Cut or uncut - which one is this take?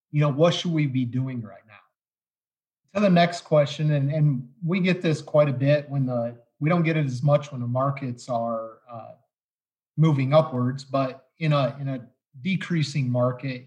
cut